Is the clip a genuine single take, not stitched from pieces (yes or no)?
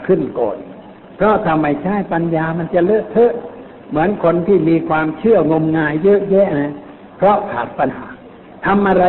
no